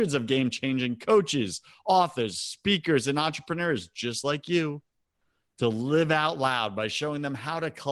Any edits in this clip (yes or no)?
no